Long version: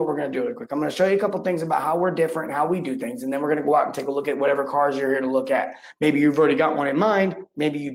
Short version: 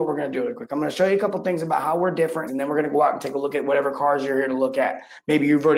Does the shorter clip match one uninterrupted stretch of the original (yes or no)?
no